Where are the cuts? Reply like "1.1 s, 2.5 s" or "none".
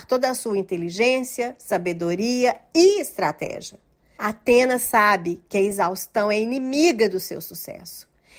4.2 s